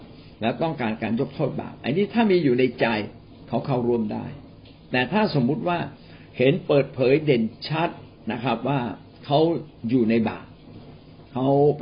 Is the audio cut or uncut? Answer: uncut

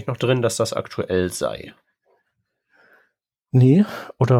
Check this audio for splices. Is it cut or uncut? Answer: uncut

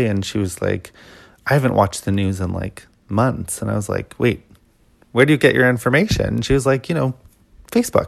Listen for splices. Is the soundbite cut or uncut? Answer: uncut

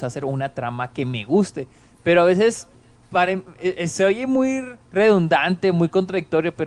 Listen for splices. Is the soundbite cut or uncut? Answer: cut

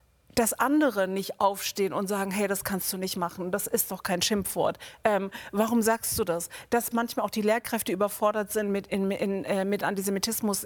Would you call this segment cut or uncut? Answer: uncut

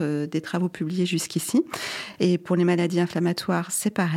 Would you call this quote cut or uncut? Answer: uncut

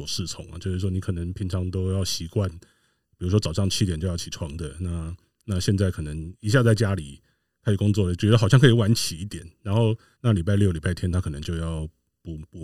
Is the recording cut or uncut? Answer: cut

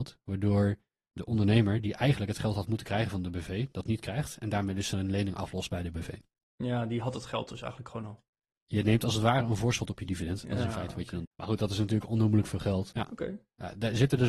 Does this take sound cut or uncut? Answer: cut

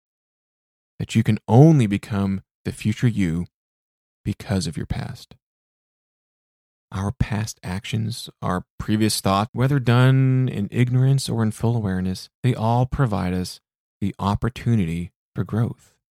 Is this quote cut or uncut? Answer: cut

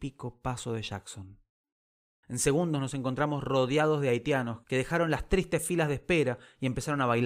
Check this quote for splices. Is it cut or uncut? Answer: cut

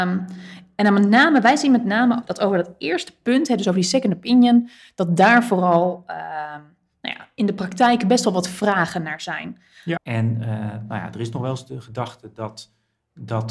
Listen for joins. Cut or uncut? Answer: cut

